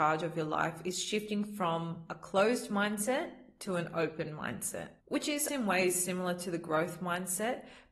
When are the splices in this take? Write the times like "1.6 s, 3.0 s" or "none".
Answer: 5.5 s